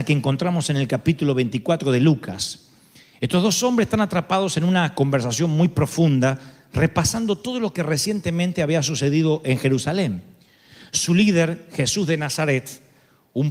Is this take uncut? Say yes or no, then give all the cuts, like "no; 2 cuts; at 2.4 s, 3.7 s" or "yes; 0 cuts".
yes; 0 cuts